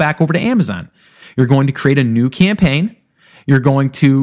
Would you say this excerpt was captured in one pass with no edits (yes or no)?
yes